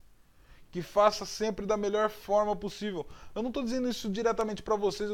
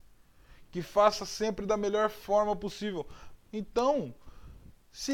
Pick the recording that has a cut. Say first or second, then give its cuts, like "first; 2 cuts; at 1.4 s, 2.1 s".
second; 1 cut; at 3.4 s